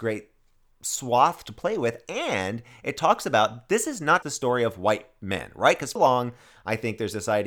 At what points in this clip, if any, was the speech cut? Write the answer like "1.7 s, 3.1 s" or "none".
4.2 s, 6.0 s